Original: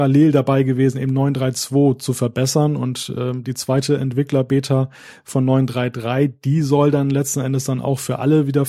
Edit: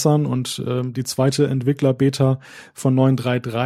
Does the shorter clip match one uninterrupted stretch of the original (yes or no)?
yes